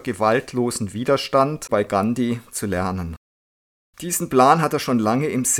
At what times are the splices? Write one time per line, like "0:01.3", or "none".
0:01.7